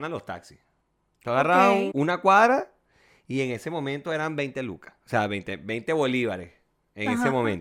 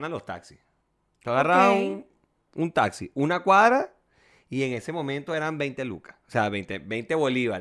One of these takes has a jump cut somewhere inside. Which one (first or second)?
first